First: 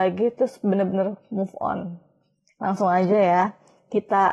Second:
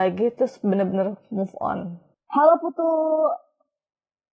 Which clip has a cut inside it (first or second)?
second